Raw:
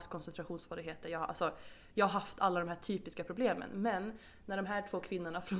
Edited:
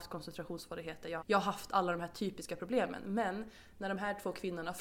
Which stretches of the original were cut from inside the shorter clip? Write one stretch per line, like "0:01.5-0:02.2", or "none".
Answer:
0:01.2-0:01.9